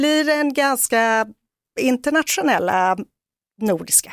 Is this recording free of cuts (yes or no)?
yes